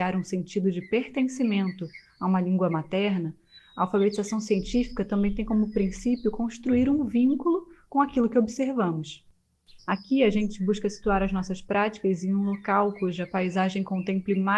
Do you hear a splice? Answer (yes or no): yes